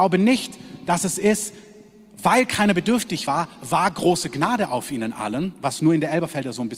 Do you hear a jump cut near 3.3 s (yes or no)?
no